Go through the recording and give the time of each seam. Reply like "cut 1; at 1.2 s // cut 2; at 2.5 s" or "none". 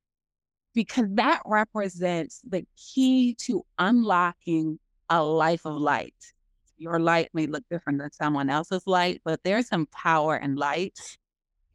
cut 1; at 6.7 s